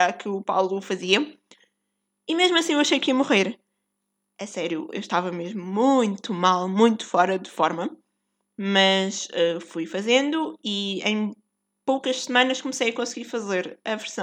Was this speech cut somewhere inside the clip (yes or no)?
no